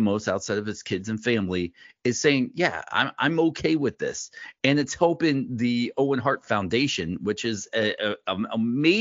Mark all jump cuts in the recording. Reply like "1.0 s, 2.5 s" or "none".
none